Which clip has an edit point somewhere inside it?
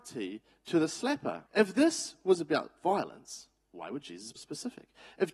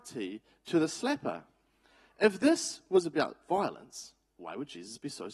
first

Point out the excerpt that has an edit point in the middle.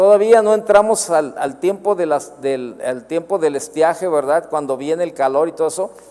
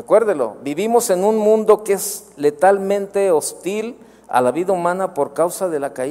first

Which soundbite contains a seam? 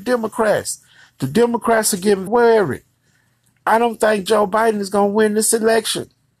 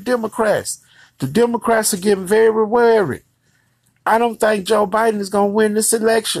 first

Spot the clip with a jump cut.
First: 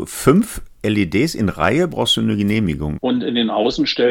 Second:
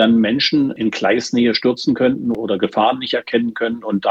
first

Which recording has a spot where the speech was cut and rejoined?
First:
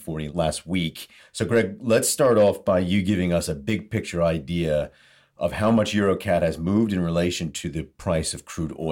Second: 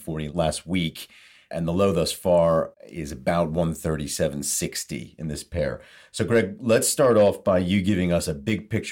first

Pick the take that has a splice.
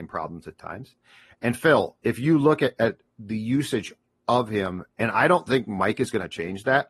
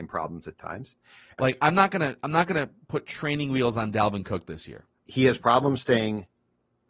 second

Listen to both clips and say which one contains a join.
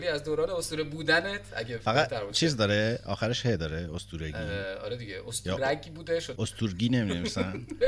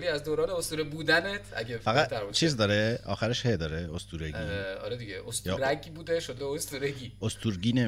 first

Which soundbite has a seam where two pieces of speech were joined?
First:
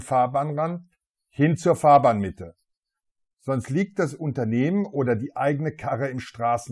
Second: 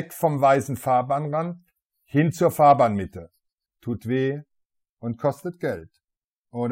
second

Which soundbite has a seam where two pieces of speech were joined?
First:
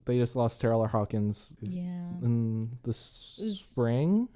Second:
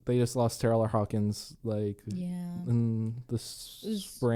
first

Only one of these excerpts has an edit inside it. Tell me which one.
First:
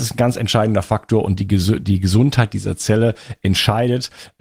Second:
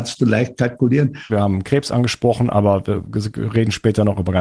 second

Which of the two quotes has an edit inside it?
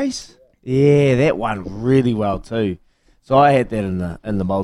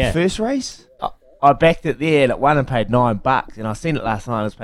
second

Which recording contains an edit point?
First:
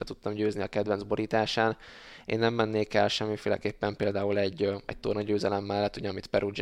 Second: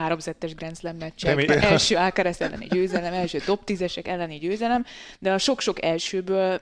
second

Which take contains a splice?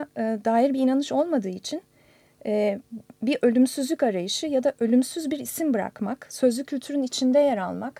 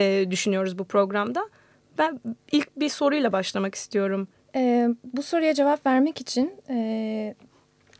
second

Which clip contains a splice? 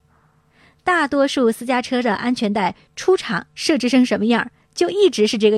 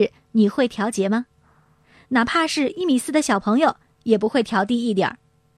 second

